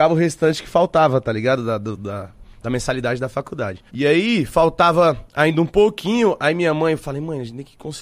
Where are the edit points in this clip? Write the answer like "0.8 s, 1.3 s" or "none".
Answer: 3.9 s